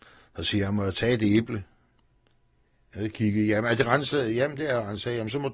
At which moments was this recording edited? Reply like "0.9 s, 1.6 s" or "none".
none